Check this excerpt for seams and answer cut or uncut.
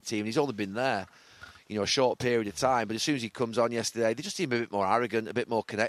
uncut